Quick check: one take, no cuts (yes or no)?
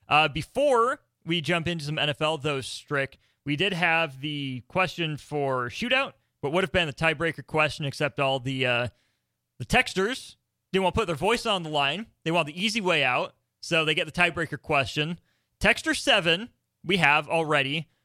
yes